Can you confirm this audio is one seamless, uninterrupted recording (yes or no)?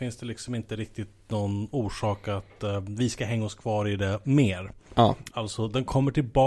no